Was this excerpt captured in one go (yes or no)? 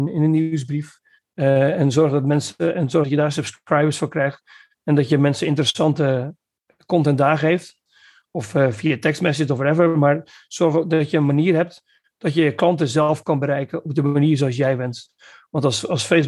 yes